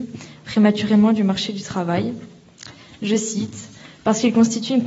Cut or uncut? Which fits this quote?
uncut